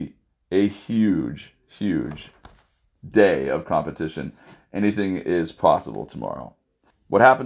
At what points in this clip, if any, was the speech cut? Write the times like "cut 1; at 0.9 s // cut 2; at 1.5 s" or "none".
none

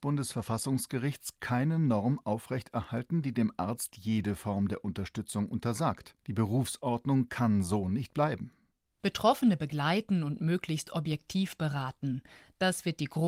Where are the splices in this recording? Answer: cut 1; at 6.2 s

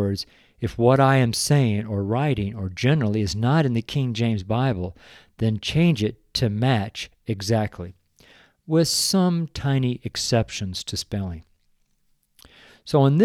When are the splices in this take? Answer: none

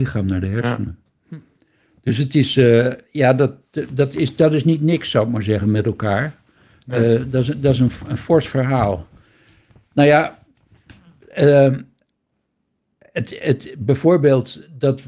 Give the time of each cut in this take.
none

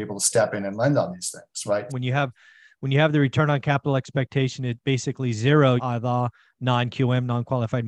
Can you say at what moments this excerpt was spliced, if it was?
cut 1; at 1.9 s // cut 2; at 5.8 s

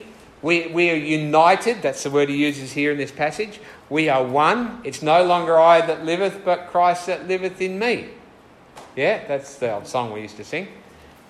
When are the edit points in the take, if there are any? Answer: none

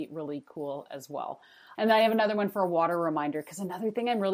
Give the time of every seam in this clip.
cut 1; at 1.7 s

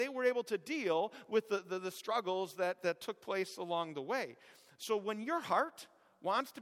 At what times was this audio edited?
none

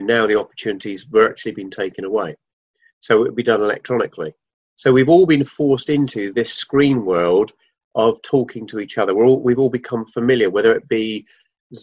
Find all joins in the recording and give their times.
none

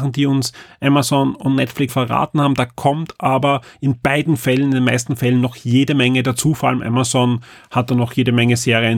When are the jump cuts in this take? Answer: cut 1; at 1.9 s

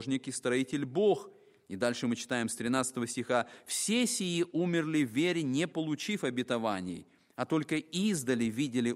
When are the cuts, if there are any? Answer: none

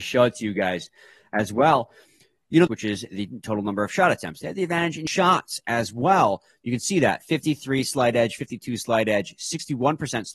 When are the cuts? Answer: cut 1; at 2.7 s

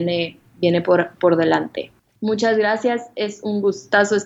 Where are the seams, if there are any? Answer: cut 1; at 2.0 s

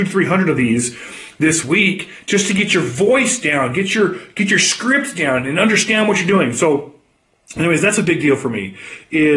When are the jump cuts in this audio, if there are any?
none

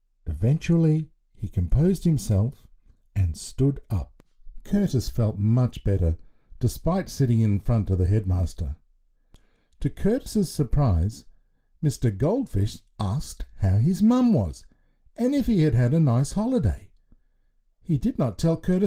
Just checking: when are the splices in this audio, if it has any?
cut 1; at 3.0 s

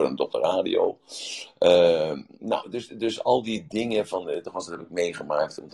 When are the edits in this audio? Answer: cut 1; at 4.4 s

